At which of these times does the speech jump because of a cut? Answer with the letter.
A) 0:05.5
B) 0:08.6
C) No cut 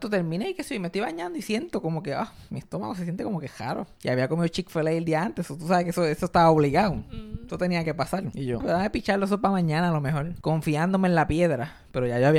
B